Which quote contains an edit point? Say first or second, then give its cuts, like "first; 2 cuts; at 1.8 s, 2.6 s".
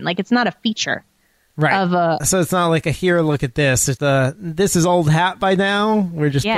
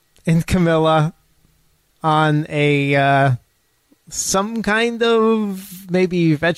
first; 2 cuts; at 2.2 s, 4.0 s